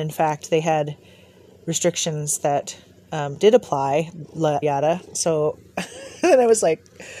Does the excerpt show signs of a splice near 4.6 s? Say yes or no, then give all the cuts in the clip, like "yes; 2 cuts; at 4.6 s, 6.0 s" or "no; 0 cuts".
yes; 1 cut; at 4.6 s